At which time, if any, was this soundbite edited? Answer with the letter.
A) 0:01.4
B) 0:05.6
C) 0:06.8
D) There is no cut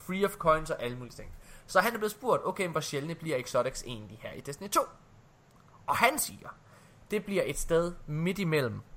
D